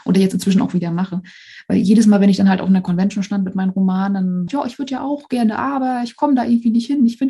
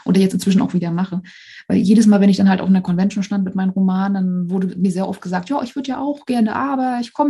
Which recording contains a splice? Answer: first; 1 cut; at 4.5 s

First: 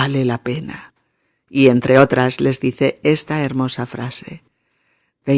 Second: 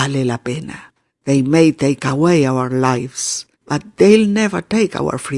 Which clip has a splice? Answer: second; 2 cuts; at 1.1 s, 3.5 s

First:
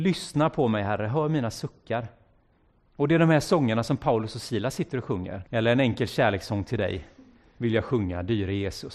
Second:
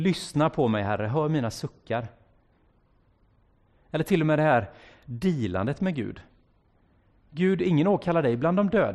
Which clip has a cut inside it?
first; 2 cuts; at 2.9 s, 5.4 s

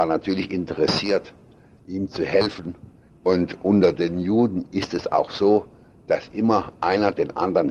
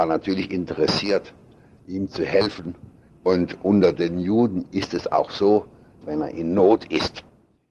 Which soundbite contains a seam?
second; 1 cut; at 6.0 s

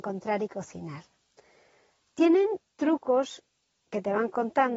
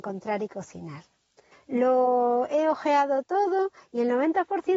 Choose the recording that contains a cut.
second; 1 cut; at 1.5 s

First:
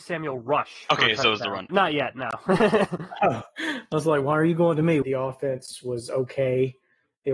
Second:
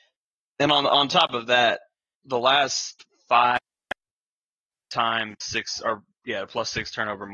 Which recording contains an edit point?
first; 2 cuts; at 1.7 s, 5.0 s

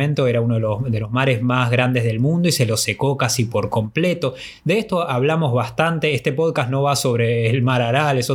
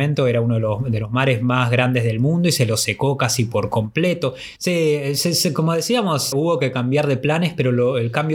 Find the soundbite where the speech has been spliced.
second; 2 cuts; at 4.6 s, 6.3 s

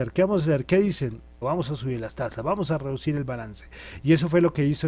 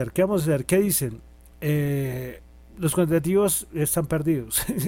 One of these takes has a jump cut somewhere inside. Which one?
first; 1 cut; at 1.4 s

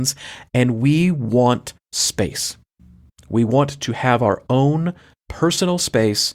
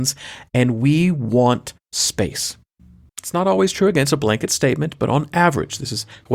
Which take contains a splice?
second; 1 cut; at 3.1 s

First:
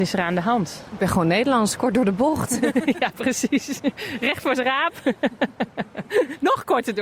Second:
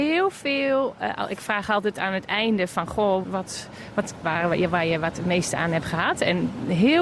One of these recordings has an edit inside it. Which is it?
second; 2 cuts; at 3.2 s, 4.2 s

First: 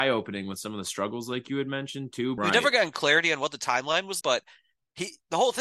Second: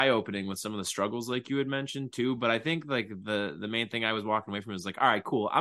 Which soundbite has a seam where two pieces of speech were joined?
first; 2 cuts; at 2.4 s, 4.2 s

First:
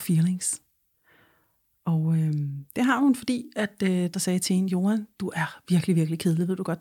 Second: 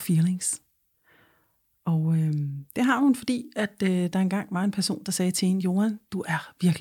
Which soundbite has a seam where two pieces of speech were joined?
first; 1 cut; at 4.1 s

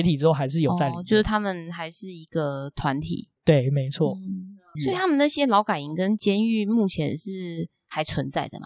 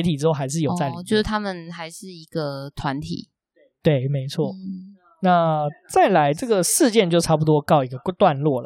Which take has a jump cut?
first; 2 cuts; at 3.4 s, 4.7 s

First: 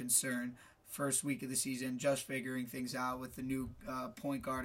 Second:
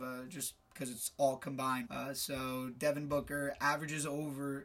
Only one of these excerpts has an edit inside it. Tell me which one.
second; 1 cut; at 1.9 s

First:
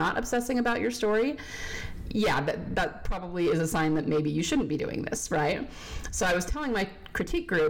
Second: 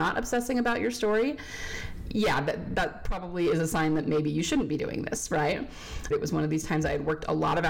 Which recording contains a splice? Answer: second; 1 cut; at 6.1 s

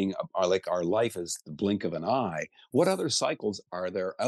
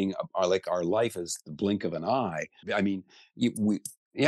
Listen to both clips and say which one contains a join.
second; 1 cut; at 2.6 s

